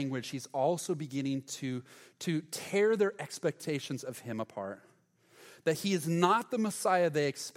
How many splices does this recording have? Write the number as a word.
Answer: zero